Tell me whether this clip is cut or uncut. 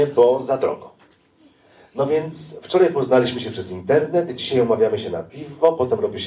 uncut